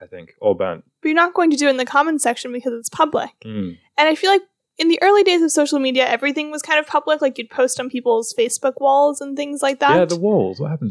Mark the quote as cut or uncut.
uncut